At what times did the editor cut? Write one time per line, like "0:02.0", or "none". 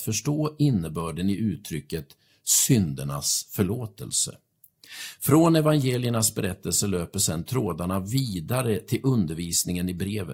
none